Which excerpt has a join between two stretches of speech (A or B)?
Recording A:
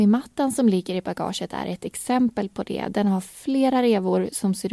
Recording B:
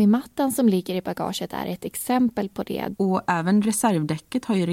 B